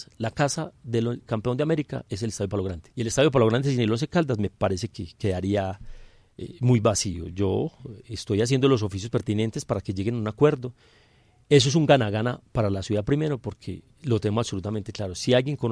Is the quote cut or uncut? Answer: cut